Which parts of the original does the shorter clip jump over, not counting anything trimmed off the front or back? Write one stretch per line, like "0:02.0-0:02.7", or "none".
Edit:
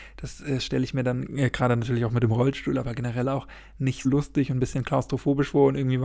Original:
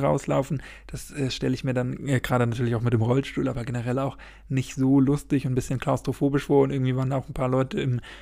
0:04.7-0:05.0